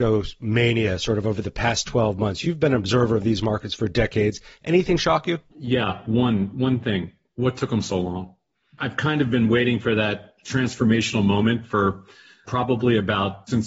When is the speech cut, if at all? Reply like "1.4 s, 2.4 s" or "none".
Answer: none

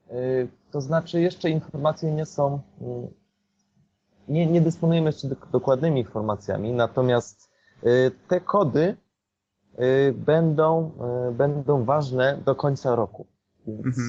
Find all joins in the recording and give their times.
none

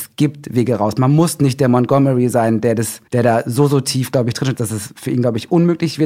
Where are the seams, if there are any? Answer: 3.1 s, 4.6 s

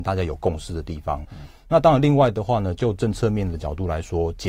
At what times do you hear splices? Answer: 1.2 s

